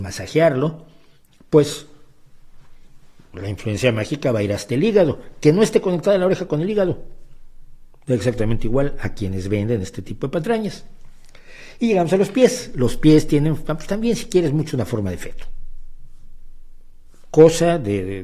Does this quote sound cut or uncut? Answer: uncut